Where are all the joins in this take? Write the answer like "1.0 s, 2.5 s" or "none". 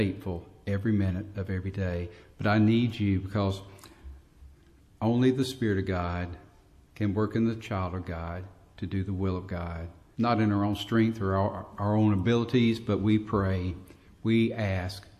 10.1 s